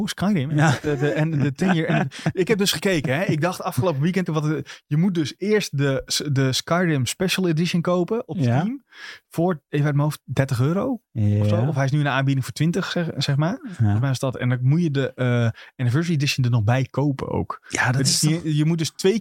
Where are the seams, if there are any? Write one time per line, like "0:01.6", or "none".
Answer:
0:04.3

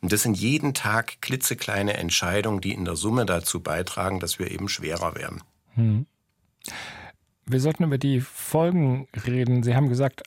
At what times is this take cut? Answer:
none

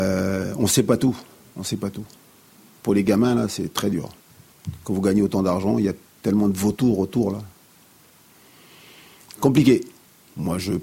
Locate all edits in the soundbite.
none

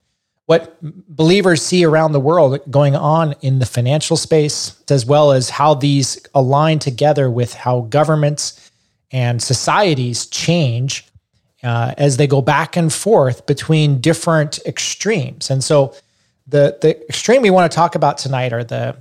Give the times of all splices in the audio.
0:04.9

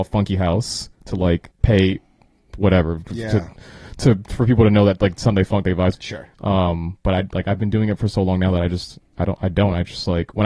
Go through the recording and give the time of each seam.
0:01.5
0:05.9

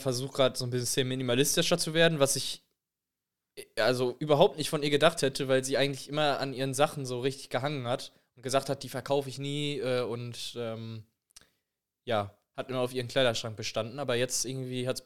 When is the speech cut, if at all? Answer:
none

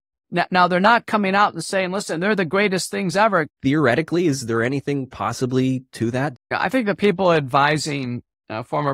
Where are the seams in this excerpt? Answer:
0:03.5
0:06.3

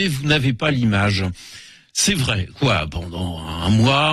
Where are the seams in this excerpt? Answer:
0:02.5

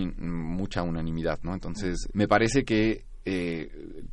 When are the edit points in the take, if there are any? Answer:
0:02.1

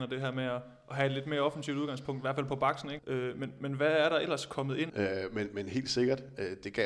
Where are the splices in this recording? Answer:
0:03.0
0:04.9

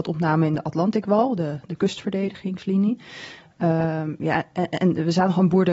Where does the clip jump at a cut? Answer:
none

